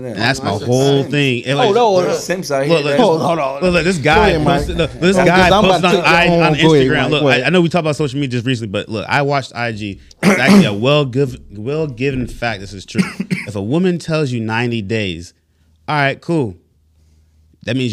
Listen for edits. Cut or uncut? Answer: uncut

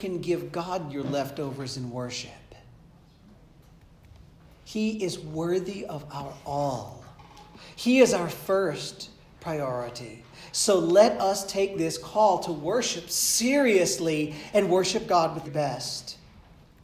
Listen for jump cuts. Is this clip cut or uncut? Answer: cut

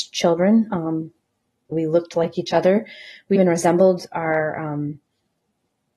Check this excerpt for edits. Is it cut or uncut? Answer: cut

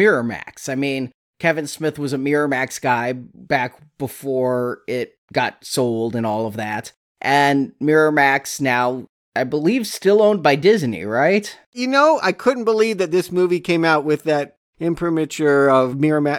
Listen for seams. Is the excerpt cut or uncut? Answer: uncut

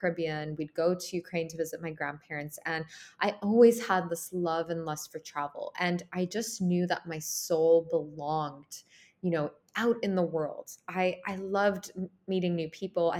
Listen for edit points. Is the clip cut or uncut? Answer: uncut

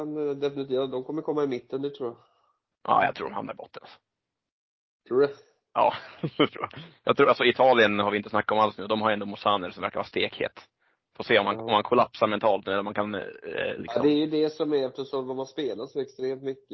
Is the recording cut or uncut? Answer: uncut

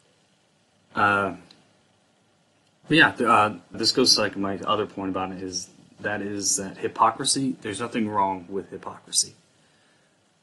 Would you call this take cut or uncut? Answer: cut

